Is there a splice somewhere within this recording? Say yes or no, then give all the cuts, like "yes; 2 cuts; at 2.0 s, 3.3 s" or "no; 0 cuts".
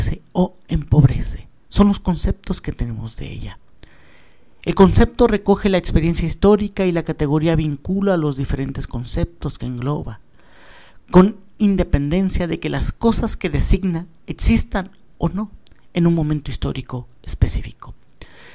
no; 0 cuts